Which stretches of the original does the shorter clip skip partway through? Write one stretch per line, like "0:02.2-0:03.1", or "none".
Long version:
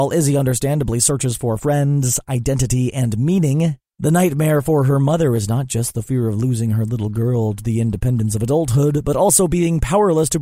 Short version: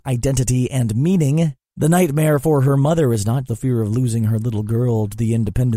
0:05.7-0:05.9